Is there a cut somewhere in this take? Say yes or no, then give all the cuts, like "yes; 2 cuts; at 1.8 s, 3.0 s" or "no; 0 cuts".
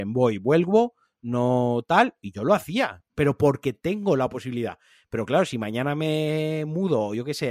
yes; 1 cut; at 3.1 s